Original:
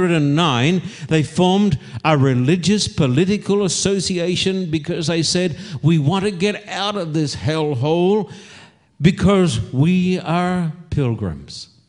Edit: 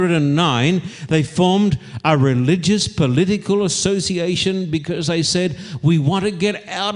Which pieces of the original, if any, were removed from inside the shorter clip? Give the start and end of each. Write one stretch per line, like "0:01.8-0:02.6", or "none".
none